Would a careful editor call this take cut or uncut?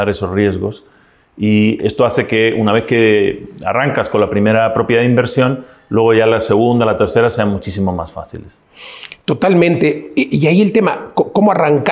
cut